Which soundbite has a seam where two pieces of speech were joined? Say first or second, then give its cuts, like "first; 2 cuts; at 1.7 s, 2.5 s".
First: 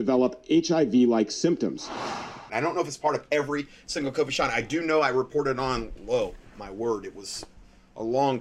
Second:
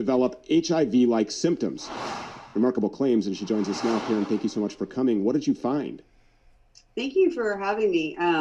first; 1 cut; at 2.5 s